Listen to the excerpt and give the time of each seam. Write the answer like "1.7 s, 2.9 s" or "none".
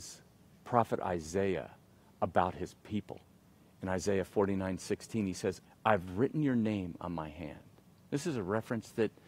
5.7 s